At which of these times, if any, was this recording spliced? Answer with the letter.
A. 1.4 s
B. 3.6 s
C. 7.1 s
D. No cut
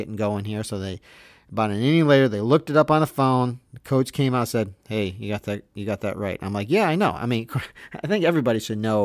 D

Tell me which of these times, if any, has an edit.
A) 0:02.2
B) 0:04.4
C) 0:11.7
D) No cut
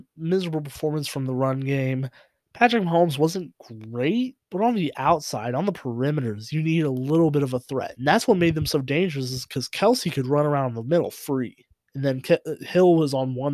B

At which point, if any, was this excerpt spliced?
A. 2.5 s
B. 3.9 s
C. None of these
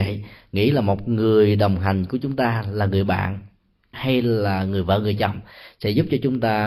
B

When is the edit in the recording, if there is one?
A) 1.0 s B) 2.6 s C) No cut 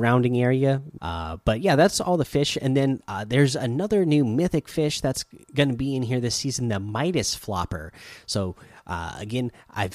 A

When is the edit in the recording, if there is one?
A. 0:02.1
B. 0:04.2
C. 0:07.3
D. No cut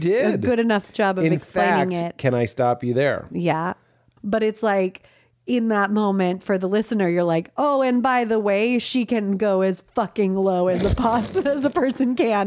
B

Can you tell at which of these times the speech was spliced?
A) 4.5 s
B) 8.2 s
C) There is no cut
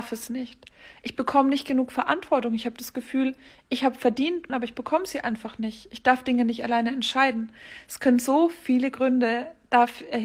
A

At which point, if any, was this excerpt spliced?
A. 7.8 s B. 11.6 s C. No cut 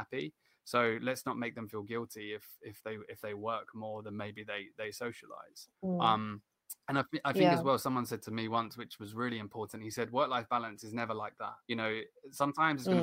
B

